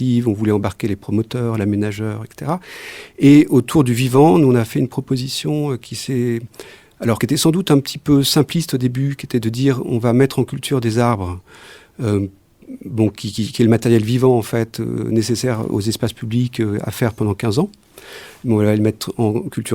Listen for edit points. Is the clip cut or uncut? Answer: uncut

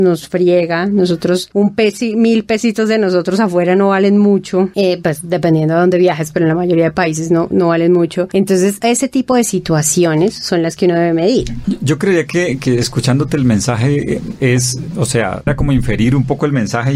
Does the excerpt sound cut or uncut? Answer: uncut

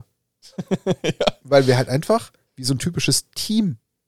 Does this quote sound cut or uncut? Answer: cut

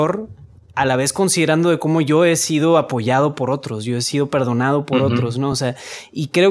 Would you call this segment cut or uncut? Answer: uncut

